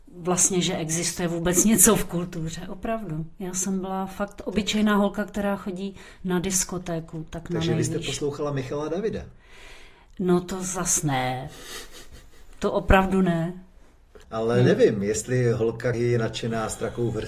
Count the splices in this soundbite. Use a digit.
2